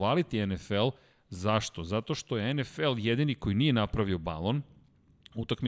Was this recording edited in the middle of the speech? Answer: no; 0 cuts

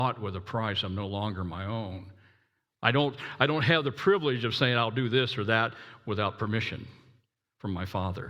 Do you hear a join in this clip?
no; 0 cuts

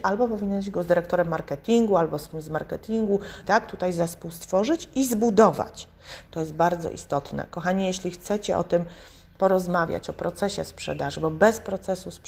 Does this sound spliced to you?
yes; 2 cuts; at 3.4 s, 6.3 s

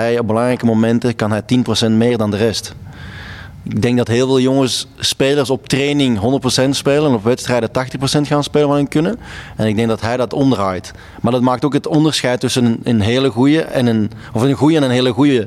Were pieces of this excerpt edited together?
no; 0 cuts

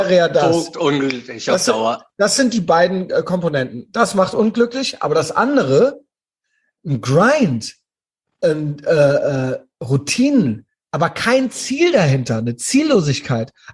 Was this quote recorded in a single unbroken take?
no; 1 cut; at 10.9 s

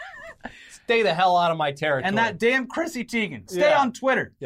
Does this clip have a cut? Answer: no; 0 cuts

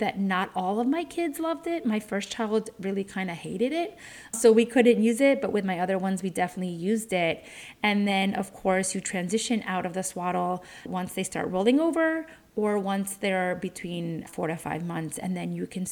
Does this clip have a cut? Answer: no; 0 cuts

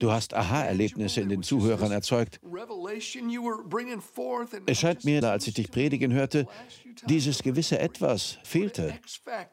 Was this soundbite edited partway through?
yes; 2 cuts; at 5.2 s, 8.4 s

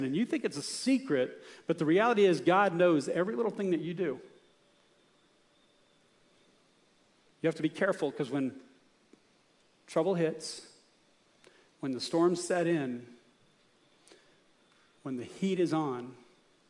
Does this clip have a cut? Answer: no; 0 cuts

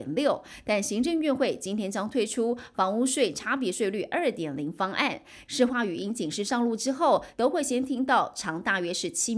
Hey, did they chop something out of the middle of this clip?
yes; 2 cuts; at 5.4 s, 7.3 s

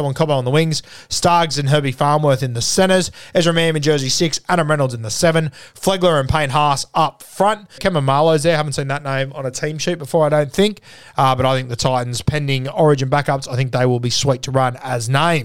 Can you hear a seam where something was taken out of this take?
yes; 1 cut; at 7.8 s

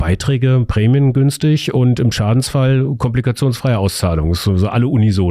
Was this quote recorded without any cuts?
yes; 0 cuts

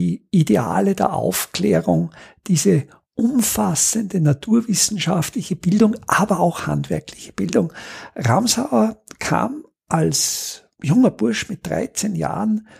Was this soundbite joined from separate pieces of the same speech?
no; 0 cuts

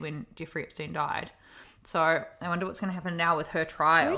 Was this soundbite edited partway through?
no; 0 cuts

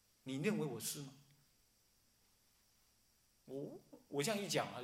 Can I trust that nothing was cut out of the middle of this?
yes; 0 cuts

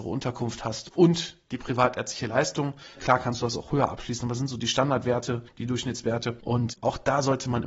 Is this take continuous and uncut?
no; 1 cut; at 3.0 s

